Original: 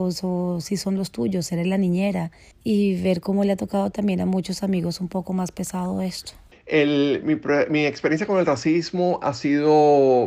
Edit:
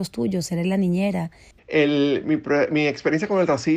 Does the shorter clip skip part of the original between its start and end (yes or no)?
yes